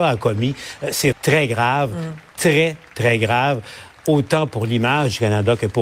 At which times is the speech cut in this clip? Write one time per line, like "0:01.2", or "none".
0:01.1

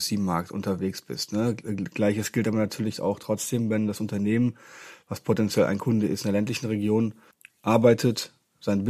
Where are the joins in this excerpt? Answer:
0:07.5

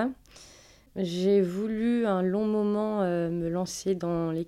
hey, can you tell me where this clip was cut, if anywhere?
none

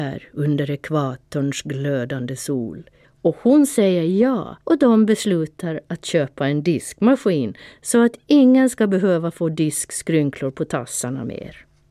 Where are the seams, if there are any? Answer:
0:03.0
0:04.6

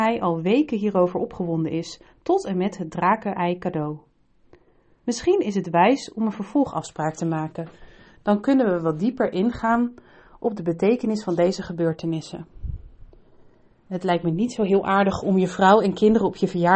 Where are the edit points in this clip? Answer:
0:05.0

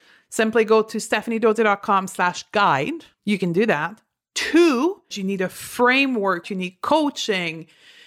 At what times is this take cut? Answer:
0:03.1
0:05.1
0:06.4

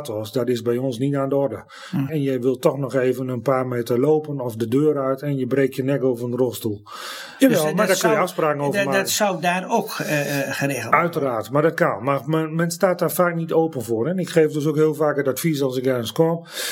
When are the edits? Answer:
0:02.1
0:07.4

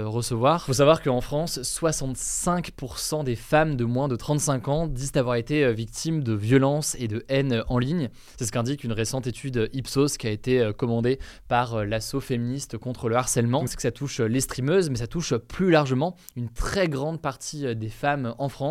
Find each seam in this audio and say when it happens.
0:13.7

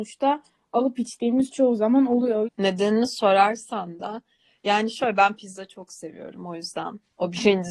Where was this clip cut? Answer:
0:02.4

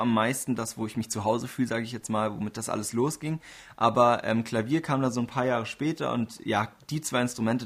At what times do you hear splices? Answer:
none

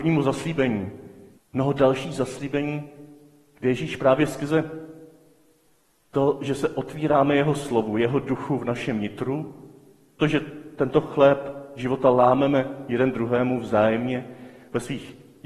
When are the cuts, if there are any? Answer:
0:01.4
0:10.2

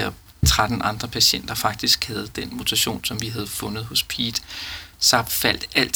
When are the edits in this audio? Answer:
none

